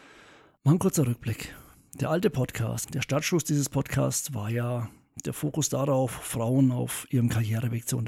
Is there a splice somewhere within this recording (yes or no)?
yes